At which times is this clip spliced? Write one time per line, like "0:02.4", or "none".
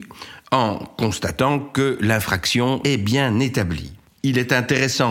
0:02.8